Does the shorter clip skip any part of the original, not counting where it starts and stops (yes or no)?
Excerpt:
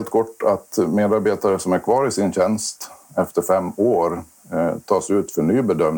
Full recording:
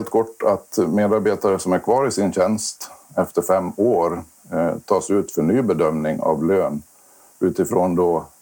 no